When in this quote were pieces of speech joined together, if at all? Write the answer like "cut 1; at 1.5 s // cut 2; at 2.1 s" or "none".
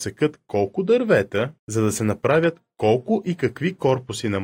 cut 1; at 1.6 s